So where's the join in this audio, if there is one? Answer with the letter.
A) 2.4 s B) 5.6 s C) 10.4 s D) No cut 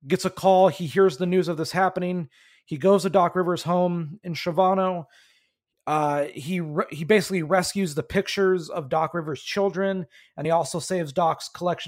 D